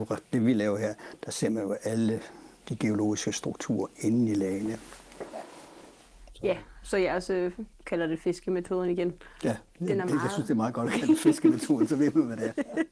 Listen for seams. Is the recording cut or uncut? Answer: cut